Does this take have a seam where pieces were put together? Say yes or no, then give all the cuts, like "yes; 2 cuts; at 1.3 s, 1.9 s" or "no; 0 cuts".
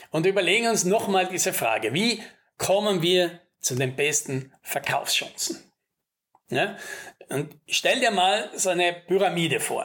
no; 0 cuts